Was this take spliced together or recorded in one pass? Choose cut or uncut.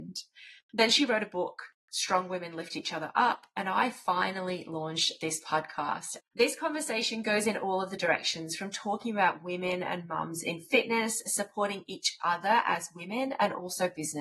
cut